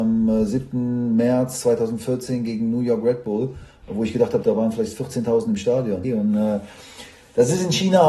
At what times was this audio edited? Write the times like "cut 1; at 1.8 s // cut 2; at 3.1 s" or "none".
cut 1; at 4.4 s // cut 2; at 6.0 s